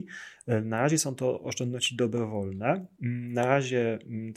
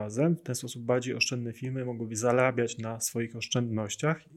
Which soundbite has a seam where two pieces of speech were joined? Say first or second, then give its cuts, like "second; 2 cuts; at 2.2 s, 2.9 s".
first; 1 cut; at 3.0 s